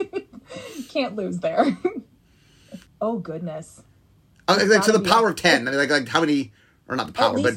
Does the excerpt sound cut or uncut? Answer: cut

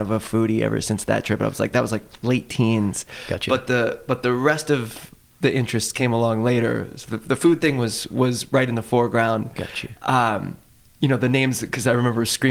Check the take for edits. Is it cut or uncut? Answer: uncut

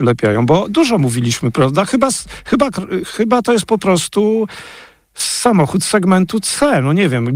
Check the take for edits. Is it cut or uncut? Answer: uncut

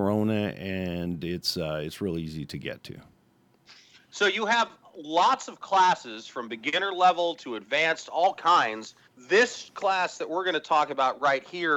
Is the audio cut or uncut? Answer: cut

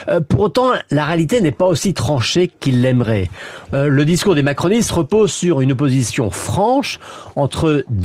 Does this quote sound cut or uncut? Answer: cut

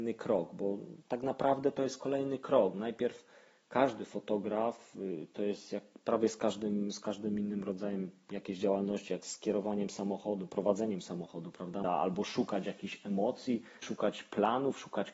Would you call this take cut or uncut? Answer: cut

